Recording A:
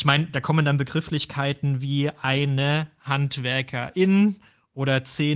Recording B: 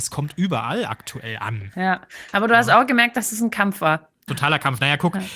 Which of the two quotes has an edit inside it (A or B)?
B